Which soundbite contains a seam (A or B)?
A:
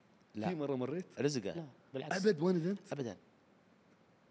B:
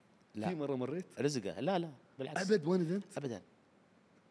A